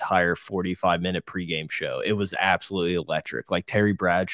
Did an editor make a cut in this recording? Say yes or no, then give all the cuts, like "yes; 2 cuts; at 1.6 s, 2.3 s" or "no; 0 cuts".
no; 0 cuts